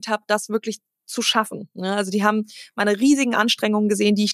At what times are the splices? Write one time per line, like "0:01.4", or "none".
none

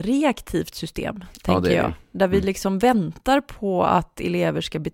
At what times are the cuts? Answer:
none

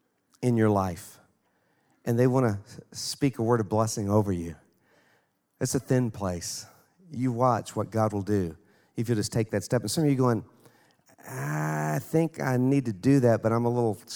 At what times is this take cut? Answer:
none

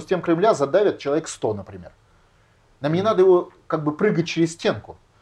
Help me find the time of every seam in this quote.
0:02.8

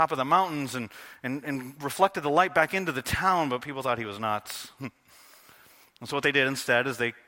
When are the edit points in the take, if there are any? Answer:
none

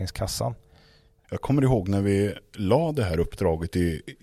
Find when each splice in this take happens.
0:01.2

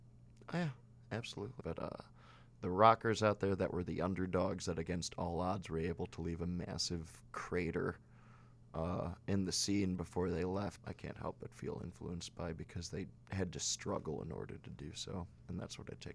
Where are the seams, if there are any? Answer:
0:01.6
0:10.8
0:13.2

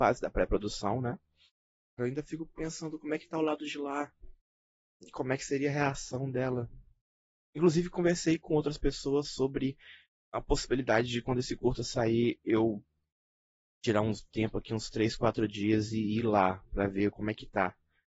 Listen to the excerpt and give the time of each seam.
0:02.0

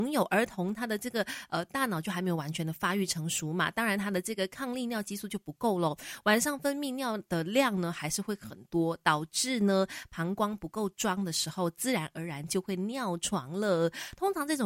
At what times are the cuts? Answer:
none

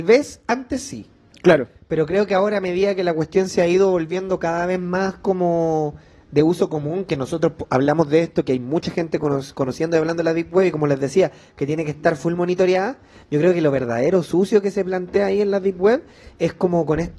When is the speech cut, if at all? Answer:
none

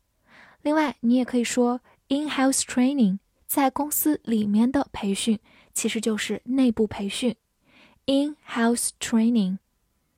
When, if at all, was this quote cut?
0:03.4

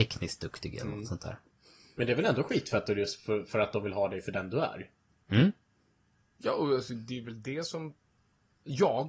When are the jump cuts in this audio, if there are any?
none

